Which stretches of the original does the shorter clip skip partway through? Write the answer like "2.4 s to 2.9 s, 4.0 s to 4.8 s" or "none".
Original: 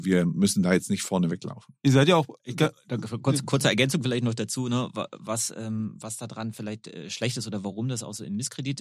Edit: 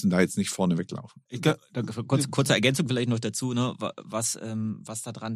1.8 s to 2.4 s